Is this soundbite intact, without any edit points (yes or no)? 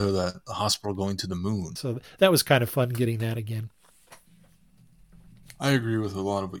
no